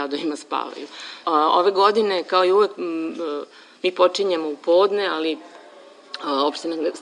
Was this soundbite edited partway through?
yes; 1 cut; at 1.2 s

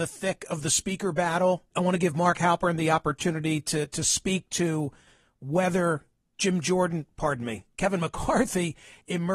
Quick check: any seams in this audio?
yes; 1 cut; at 1.7 s

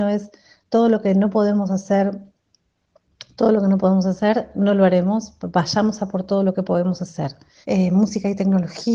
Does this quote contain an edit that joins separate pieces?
yes; 1 cut; at 7.6 s

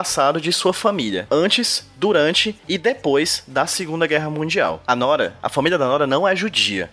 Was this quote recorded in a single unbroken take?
no; 1 cut; at 1.3 s

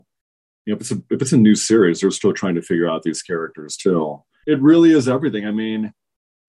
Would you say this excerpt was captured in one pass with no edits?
no; 1 cut; at 4.4 s

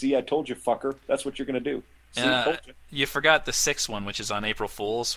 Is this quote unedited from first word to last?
yes; 0 cuts

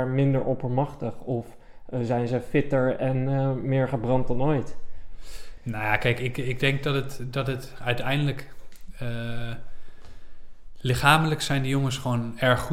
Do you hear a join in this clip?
no; 0 cuts

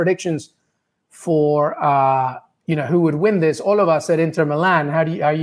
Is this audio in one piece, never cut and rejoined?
yes; 0 cuts

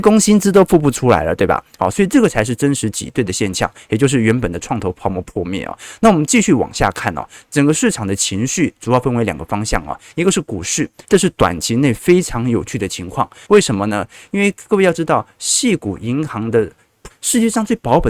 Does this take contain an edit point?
yes; 3 cuts; at 11.0 s, 13.4 s, 17.1 s

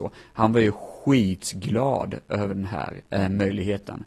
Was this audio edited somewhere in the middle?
yes; 1 cut; at 3.1 s

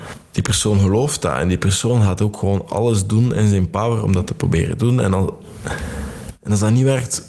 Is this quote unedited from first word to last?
yes; 0 cuts

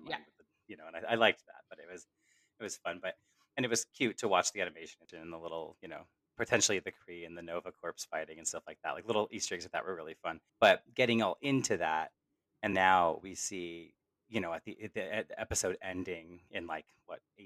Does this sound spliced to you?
yes; 2 cuts; at 10.5 s, 12.7 s

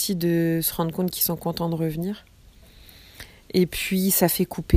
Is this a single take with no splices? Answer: yes; 0 cuts

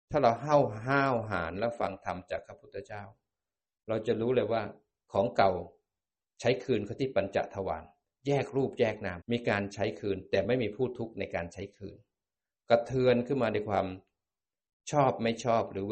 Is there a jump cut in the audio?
yes; 1 cut; at 9.2 s

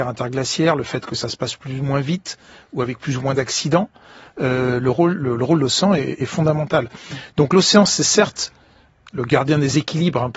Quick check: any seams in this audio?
no; 0 cuts

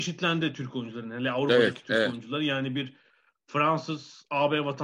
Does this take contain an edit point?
no; 0 cuts

